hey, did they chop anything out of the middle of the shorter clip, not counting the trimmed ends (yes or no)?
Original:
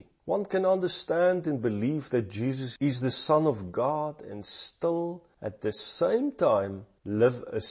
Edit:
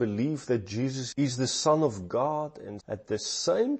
yes